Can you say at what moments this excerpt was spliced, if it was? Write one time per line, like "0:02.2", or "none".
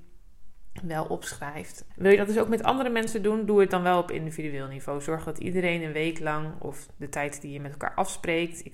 0:01.9